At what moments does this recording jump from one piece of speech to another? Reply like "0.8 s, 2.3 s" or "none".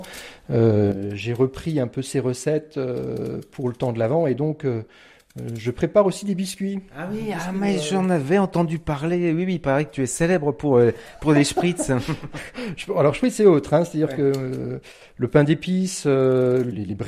none